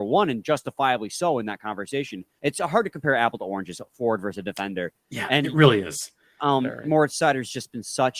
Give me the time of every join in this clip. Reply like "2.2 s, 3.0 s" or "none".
2.4 s